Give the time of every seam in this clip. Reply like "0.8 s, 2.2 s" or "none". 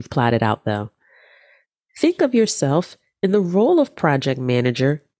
none